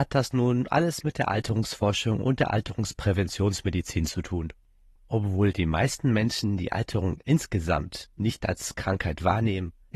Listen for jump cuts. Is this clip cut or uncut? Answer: cut